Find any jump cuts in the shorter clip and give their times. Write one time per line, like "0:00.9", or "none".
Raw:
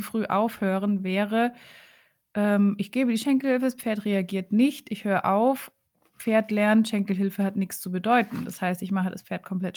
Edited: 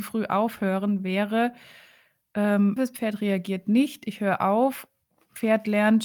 0:02.8